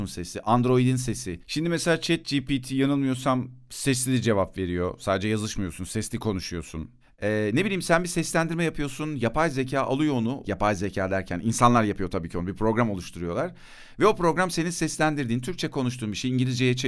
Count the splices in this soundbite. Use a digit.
1